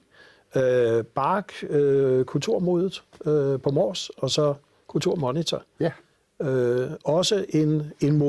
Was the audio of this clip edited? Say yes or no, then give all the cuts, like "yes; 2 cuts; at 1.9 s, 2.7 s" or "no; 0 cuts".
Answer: no; 0 cuts